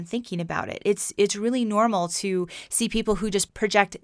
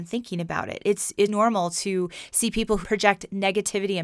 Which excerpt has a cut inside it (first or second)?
second